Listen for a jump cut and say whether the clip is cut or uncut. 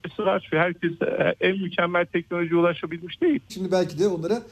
cut